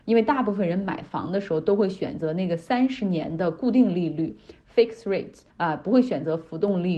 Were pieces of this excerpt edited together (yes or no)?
yes